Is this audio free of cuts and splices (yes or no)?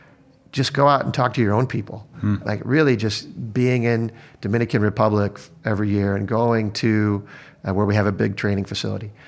yes